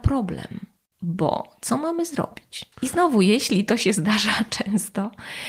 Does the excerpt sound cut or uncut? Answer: cut